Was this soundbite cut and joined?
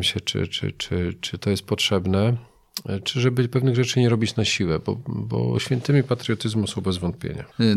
no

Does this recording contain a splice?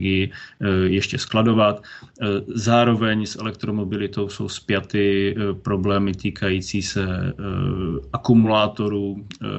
no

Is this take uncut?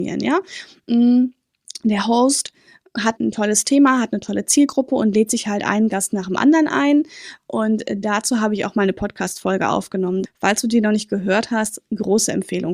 no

